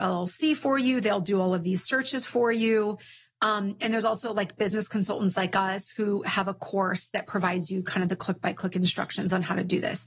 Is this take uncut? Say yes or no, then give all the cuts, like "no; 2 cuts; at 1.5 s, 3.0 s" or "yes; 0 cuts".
yes; 0 cuts